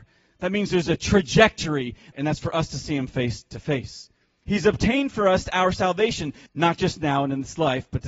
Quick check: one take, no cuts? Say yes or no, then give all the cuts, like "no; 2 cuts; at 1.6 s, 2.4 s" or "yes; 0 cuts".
no; 3 cuts; at 2.1 s, 4.4 s, 6.5 s